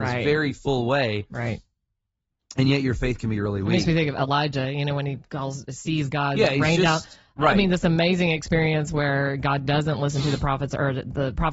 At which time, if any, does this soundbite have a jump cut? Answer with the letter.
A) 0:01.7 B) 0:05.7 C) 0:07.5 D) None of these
D